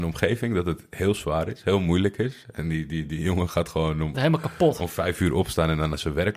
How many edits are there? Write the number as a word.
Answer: one